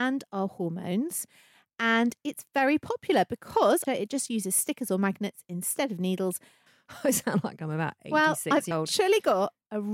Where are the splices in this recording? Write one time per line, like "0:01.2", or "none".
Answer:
0:03.9
0:06.7
0:08.7